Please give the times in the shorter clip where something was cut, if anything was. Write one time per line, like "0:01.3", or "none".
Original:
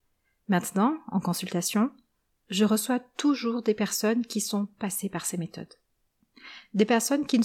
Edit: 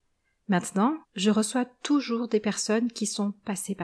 0:01.0